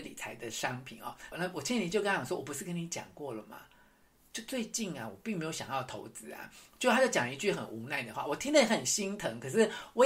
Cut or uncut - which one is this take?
cut